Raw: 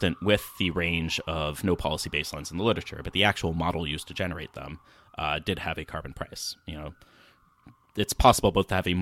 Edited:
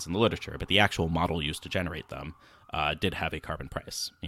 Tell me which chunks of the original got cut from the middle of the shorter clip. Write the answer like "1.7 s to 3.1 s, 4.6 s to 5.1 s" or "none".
none